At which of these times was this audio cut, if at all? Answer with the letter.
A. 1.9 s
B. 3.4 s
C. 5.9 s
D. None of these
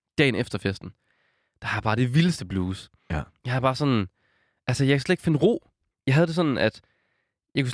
C